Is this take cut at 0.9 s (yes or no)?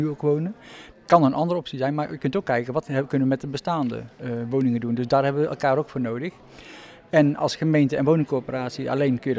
yes